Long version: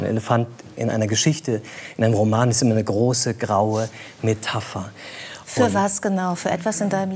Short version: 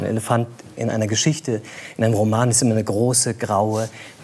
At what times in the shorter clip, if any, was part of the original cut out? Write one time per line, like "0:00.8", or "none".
none